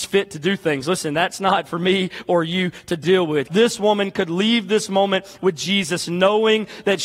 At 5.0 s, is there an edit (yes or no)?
no